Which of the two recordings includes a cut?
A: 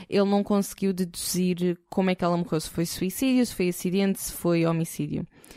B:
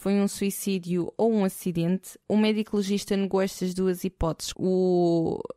B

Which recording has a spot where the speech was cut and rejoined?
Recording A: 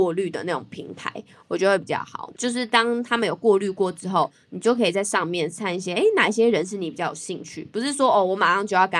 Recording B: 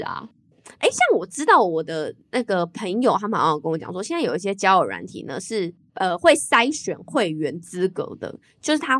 A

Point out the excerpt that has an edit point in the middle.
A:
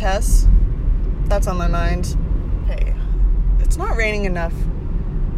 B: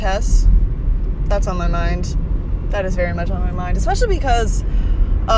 A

